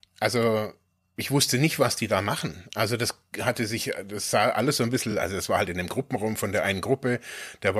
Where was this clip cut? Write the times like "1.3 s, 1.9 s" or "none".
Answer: none